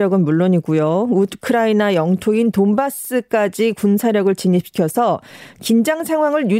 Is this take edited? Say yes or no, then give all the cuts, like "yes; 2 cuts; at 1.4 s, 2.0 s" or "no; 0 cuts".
no; 0 cuts